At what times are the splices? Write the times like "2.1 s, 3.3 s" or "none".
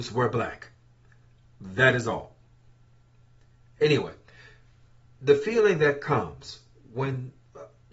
none

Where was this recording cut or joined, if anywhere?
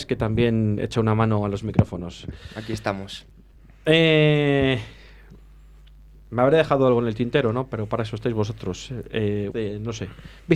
9.5 s

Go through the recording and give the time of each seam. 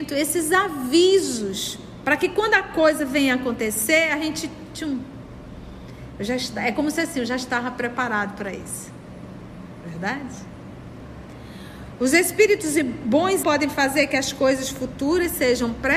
13.4 s

